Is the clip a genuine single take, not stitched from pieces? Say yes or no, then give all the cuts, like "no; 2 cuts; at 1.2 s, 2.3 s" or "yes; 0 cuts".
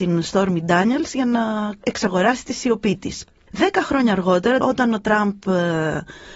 no; 2 cuts; at 3.5 s, 4.6 s